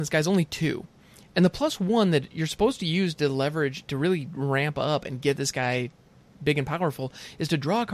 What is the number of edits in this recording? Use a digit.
0